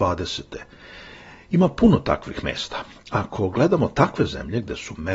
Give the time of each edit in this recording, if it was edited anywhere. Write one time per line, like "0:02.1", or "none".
none